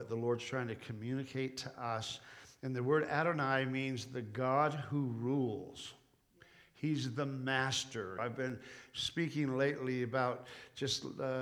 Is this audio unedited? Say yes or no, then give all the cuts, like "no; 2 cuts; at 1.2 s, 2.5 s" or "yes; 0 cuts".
no; 1 cut; at 8.2 s